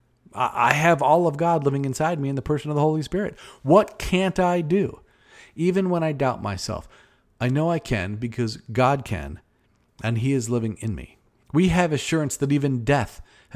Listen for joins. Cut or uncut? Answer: cut